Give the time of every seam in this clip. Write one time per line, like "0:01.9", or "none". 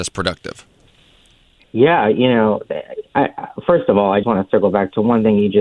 0:04.2